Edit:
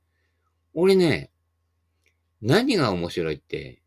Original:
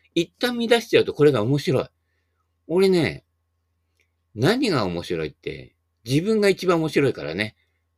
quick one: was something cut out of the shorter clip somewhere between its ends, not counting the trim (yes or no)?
no